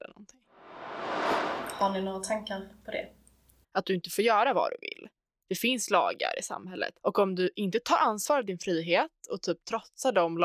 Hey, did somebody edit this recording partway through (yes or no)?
yes